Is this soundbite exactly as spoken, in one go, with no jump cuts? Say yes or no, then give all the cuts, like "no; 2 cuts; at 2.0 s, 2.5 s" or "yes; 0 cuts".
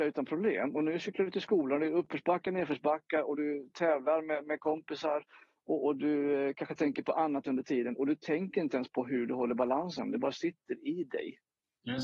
yes; 0 cuts